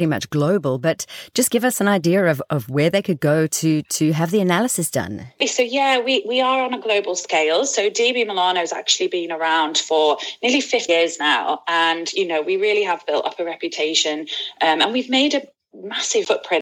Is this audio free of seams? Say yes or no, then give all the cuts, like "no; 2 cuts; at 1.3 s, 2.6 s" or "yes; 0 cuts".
no; 1 cut; at 10.9 s